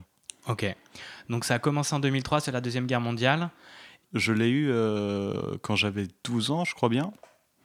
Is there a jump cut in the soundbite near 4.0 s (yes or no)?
yes